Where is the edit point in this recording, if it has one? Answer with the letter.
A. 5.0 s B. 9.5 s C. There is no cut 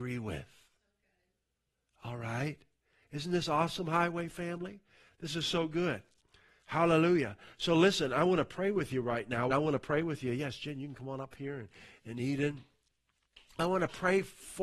B